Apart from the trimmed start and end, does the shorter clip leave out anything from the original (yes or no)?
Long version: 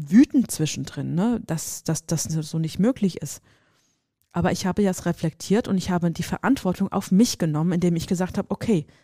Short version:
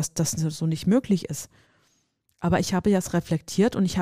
no